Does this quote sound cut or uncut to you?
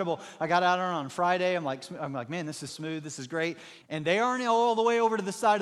cut